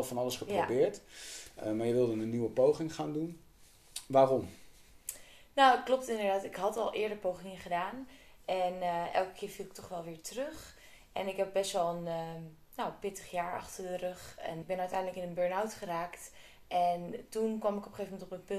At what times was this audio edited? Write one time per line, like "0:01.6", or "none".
0:14.6